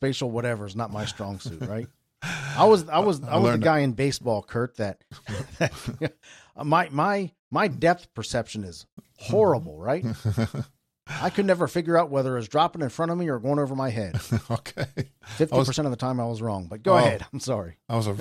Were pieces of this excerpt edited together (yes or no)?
no